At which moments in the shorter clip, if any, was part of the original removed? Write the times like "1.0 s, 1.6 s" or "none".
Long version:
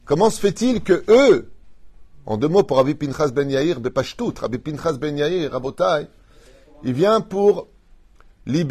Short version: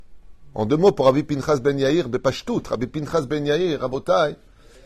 none